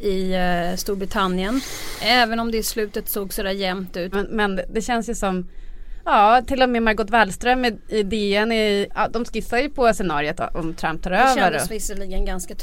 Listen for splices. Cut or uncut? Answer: cut